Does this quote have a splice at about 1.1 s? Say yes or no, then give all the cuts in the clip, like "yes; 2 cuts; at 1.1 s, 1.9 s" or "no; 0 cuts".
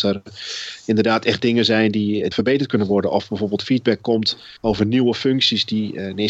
no; 2 cuts; at 2.3 s, 4.6 s